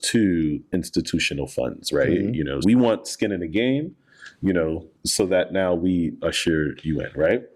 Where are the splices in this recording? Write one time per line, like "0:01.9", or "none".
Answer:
0:02.6
0:05.0